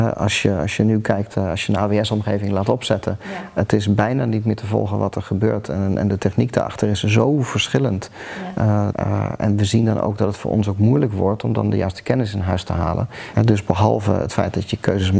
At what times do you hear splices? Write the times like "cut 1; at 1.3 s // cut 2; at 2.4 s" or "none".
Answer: cut 1; at 8.9 s // cut 2; at 13.3 s